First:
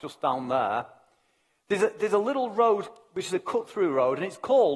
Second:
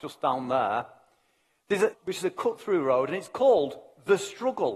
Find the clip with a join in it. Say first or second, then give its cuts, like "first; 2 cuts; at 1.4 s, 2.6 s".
second; 1 cut; at 1.9 s